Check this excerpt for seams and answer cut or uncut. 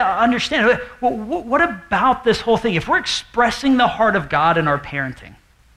uncut